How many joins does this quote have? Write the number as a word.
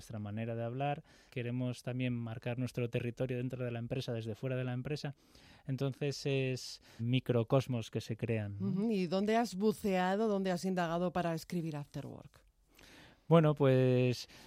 two